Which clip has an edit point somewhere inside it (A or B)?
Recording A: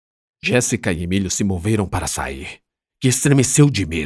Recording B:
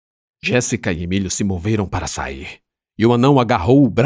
A